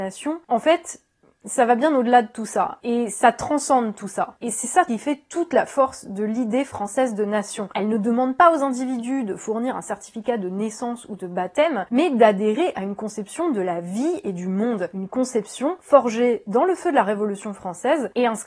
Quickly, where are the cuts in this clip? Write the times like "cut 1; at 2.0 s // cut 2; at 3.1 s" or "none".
none